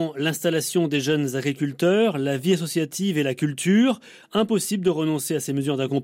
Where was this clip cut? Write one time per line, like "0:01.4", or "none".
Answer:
none